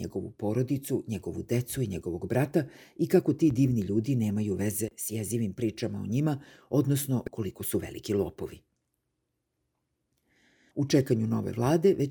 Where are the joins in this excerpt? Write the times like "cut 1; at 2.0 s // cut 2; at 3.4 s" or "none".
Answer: cut 1; at 10.7 s